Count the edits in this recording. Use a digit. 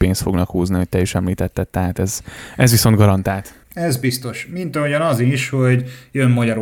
1